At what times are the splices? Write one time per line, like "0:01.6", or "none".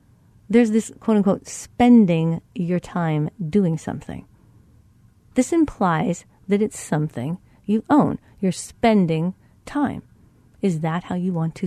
0:00.9